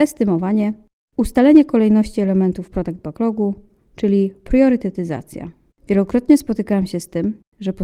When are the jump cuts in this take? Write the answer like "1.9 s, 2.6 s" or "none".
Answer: 5.7 s